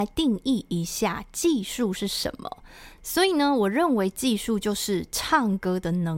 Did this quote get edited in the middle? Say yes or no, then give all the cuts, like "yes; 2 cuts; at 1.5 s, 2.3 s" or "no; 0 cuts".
yes; 1 cut; at 3.0 s